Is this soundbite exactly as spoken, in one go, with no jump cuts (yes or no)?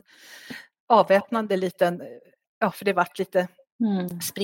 no